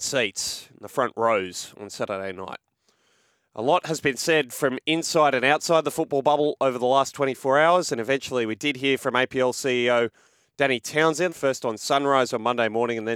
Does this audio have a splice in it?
yes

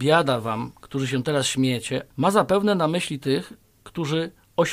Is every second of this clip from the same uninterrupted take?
no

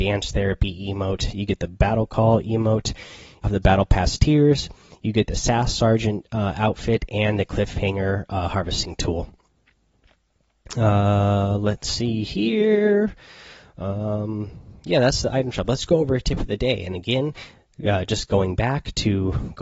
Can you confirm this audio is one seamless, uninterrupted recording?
no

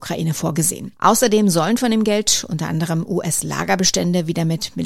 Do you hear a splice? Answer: yes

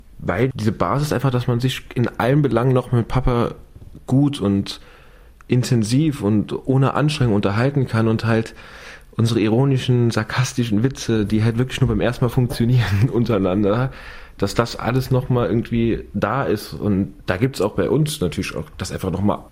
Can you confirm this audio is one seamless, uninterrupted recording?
yes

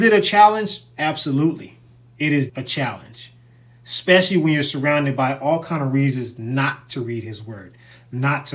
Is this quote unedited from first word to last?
no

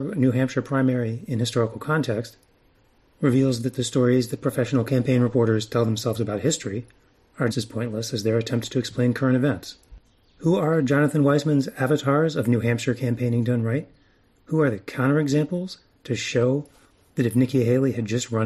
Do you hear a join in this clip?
yes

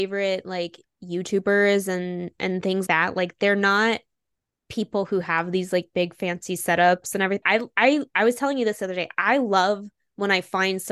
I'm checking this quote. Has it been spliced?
yes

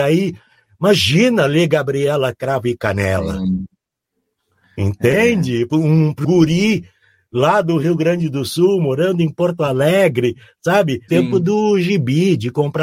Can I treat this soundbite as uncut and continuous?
no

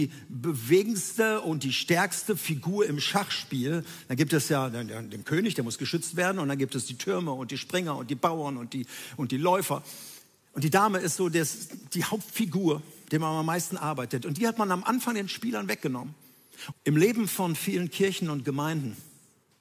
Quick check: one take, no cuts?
no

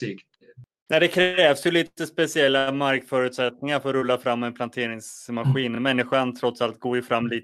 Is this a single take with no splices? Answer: yes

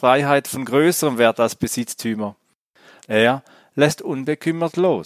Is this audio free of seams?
no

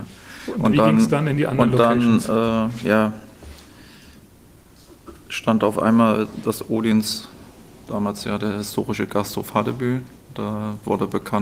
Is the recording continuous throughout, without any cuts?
yes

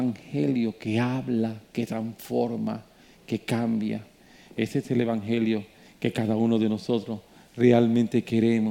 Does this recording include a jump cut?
no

